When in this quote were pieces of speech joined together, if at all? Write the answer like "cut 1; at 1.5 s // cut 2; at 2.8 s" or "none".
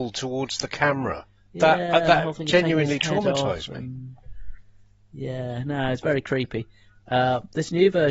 none